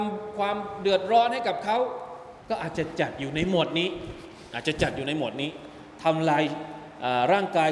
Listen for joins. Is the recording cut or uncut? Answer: cut